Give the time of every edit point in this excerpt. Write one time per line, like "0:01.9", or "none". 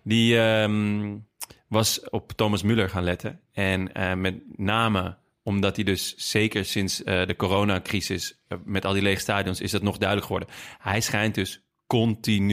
none

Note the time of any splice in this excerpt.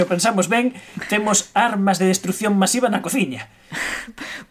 none

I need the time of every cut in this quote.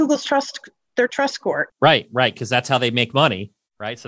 0:01.7

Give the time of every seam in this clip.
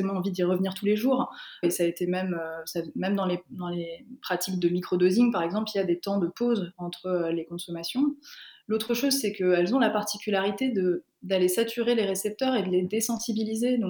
0:01.6

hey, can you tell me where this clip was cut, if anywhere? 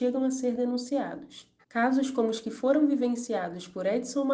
0:01.6

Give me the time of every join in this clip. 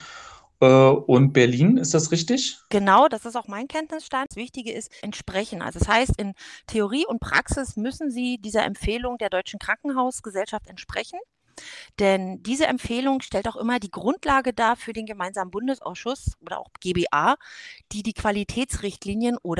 0:05.0

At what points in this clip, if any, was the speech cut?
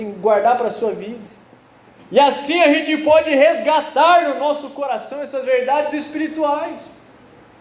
0:02.0

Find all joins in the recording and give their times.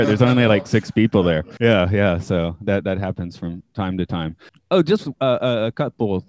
0:01.6
0:04.5

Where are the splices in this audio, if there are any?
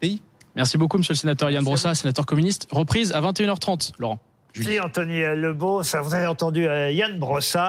none

